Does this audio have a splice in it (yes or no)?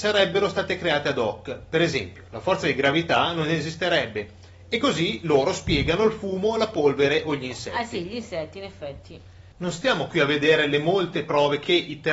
yes